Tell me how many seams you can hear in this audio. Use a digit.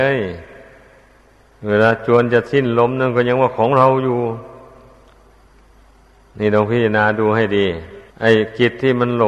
1